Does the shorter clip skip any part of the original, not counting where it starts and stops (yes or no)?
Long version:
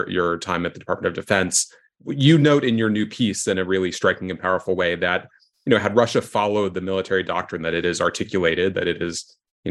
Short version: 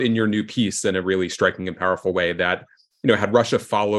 no